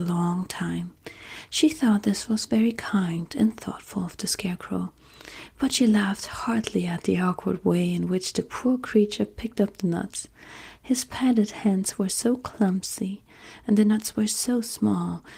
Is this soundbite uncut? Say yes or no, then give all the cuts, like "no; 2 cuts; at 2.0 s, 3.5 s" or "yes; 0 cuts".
yes; 0 cuts